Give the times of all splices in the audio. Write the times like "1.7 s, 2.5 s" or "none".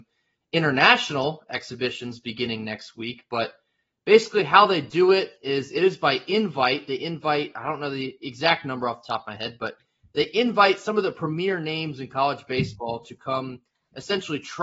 none